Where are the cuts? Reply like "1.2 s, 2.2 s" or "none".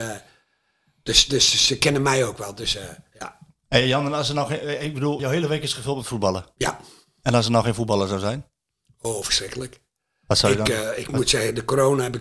5.2 s